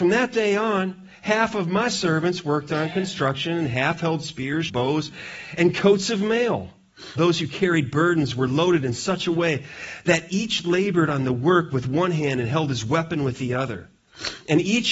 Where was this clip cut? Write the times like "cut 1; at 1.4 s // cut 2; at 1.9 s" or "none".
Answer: cut 1; at 4.7 s // cut 2; at 7.2 s